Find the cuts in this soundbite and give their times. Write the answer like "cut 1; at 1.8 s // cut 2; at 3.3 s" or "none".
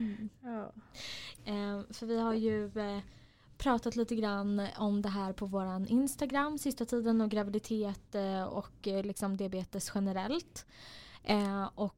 cut 1; at 1.4 s